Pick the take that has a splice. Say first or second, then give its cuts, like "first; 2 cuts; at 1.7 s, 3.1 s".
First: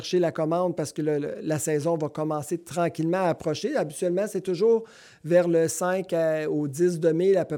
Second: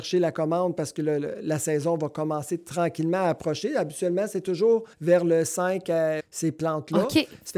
second; 2 cuts; at 4.9 s, 6.2 s